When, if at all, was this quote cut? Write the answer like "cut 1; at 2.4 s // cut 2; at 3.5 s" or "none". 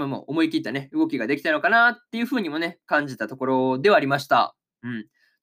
none